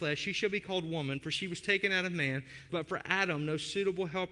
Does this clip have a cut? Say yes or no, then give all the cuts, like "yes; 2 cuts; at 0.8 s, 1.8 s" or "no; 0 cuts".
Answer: yes; 1 cut; at 2.7 s